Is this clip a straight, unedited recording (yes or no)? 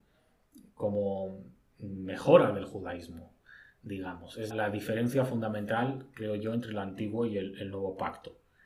no